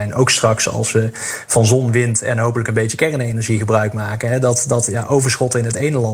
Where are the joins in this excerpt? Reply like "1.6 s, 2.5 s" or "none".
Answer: none